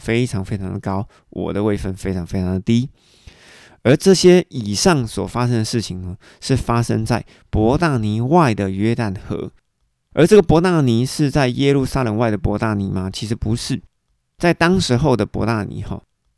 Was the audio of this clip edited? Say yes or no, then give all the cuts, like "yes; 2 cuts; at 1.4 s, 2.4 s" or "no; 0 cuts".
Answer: no; 0 cuts